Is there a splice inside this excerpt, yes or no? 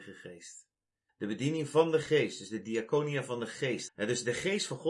yes